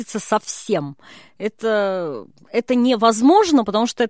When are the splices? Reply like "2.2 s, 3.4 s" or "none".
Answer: none